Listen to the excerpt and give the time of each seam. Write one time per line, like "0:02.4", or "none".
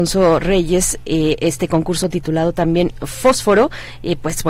none